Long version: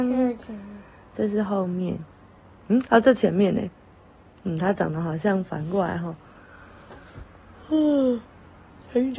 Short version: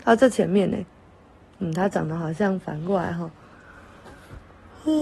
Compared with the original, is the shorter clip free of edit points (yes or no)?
yes